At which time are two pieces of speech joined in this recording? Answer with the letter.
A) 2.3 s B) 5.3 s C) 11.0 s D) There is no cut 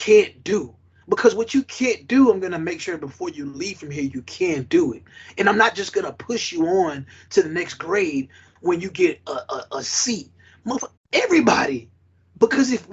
C